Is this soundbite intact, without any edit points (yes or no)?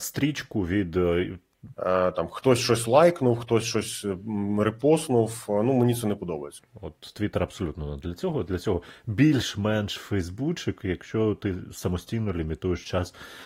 no